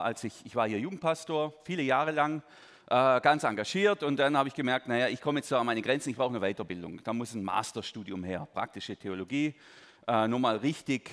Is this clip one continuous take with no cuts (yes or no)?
yes